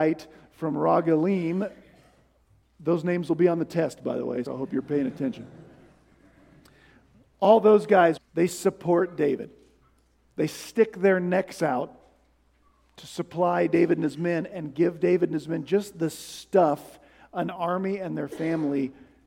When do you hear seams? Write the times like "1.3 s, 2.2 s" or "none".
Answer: 4.5 s, 8.2 s